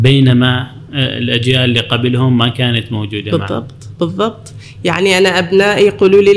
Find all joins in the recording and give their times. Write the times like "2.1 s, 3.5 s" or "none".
none